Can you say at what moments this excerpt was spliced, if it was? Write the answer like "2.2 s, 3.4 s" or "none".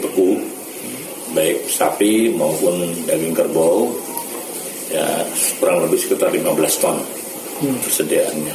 none